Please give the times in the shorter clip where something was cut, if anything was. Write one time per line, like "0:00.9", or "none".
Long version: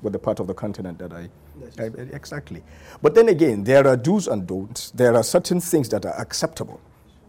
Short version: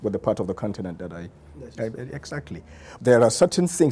0:03.0